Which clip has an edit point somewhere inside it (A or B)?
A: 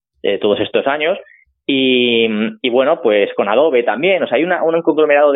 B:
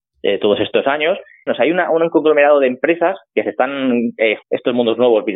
B